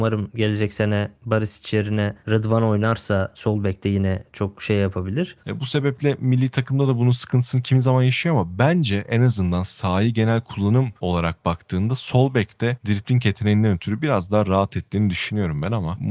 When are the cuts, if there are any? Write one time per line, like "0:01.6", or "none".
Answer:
0:05.4